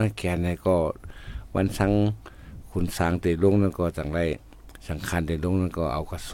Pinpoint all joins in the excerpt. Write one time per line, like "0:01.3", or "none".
0:04.8